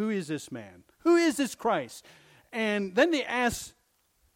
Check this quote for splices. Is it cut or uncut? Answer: uncut